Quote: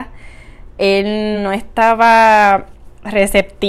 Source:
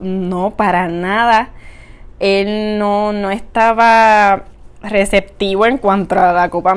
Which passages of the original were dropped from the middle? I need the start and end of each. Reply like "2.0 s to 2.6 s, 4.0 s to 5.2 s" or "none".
2.8 s to 3.1 s